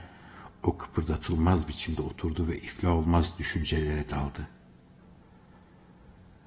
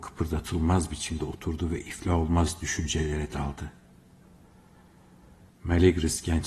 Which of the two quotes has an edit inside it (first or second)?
second